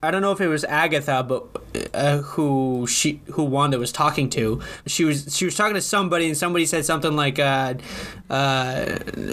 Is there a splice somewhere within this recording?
yes; 1 cut; at 4.8 s

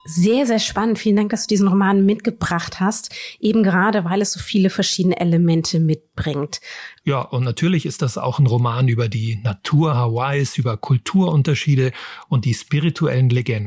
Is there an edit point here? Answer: yes; 1 cut; at 7.0 s

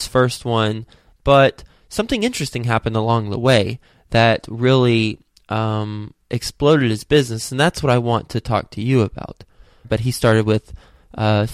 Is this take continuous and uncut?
no; 2 cuts; at 1.1 s, 9.8 s

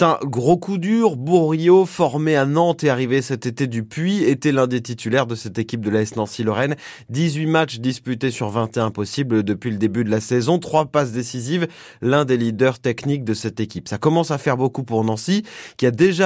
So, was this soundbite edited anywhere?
no; 0 cuts

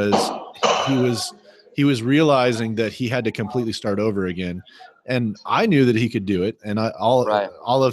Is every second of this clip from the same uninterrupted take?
yes; 0 cuts

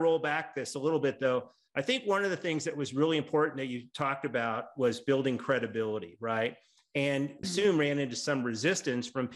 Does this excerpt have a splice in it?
yes; 1 cut; at 7.4 s

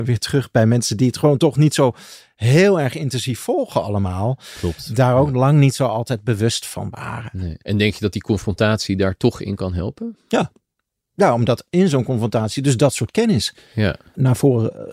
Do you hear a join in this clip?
no; 0 cuts

